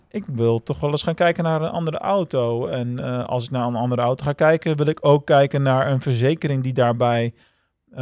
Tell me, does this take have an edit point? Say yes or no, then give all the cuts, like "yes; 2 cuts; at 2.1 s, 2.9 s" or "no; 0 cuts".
no; 0 cuts